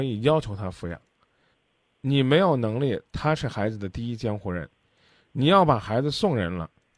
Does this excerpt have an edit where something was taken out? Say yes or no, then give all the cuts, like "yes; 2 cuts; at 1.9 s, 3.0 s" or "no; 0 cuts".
no; 0 cuts